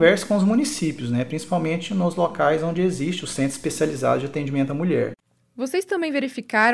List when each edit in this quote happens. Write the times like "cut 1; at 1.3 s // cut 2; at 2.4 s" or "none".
none